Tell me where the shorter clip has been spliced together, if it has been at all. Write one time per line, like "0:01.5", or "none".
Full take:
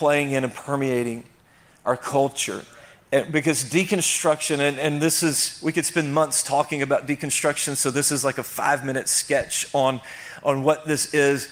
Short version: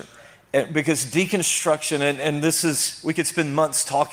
none